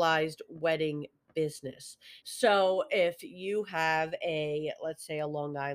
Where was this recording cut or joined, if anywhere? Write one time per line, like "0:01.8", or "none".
0:02.2